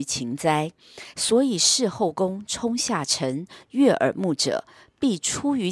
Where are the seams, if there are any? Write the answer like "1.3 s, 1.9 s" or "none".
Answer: 1.1 s, 3.7 s